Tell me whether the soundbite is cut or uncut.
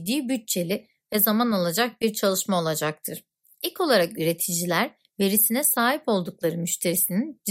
cut